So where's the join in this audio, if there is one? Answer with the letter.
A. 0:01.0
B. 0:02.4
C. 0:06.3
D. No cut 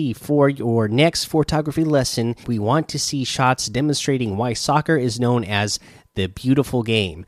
B